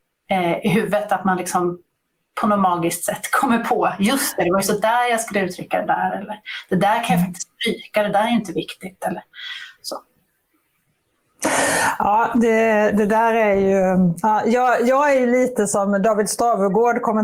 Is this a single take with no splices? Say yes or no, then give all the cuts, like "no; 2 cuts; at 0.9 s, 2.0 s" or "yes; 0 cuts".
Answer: yes; 0 cuts